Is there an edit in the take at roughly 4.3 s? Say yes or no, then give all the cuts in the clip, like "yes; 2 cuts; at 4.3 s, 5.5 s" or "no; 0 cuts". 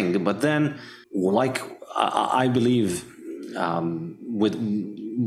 no; 1 cut; at 1.0 s